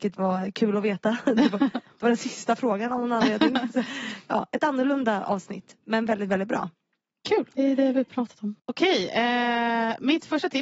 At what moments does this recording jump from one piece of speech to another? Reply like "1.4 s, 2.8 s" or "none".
5.8 s, 7.5 s, 8.6 s